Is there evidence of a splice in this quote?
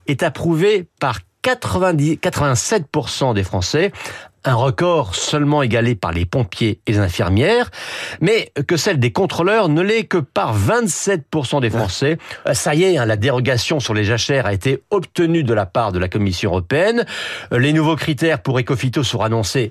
yes; 1 cut; at 12.5 s

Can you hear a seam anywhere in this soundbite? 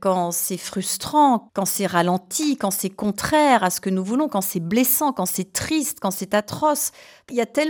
no; 0 cuts

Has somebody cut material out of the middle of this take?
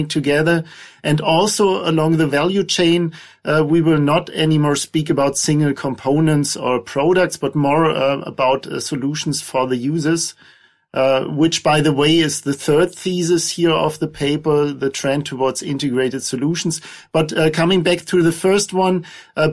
no; 0 cuts

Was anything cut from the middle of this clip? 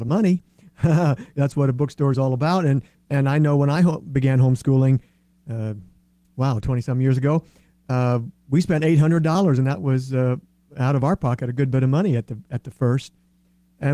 no; 0 cuts

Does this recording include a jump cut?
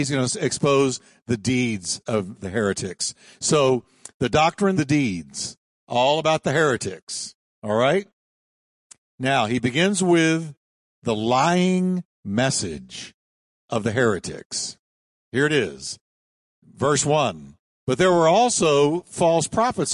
yes; 1 cut; at 4.8 s

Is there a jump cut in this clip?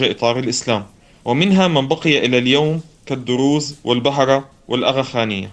yes; 1 cut; at 1.2 s

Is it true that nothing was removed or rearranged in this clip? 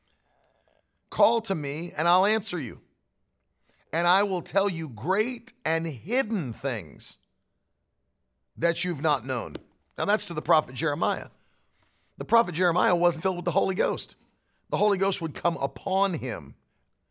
no; 1 cut; at 13.2 s

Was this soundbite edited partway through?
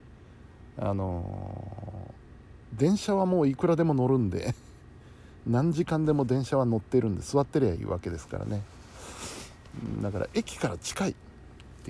yes; 1 cut; at 7.8 s

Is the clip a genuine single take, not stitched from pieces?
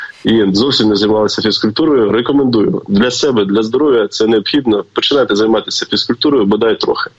yes; 0 cuts

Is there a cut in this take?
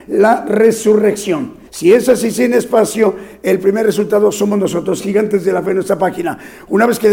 yes; 1 cut; at 1.7 s

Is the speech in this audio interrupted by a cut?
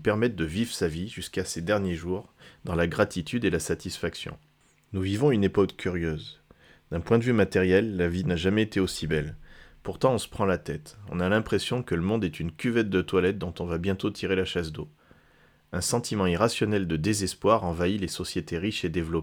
no; 0 cuts

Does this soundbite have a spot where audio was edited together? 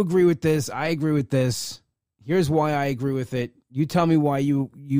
no; 0 cuts

